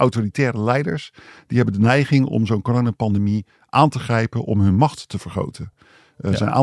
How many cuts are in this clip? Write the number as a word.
zero